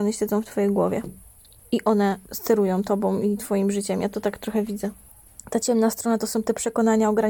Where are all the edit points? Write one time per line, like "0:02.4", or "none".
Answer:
none